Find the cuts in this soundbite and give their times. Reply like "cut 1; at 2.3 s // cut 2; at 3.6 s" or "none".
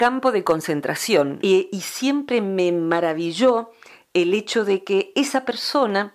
cut 1; at 1.4 s